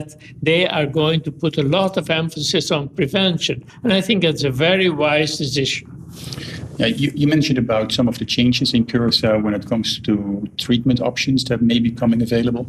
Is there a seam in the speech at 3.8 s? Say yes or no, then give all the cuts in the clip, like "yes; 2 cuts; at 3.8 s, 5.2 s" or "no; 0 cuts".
no; 0 cuts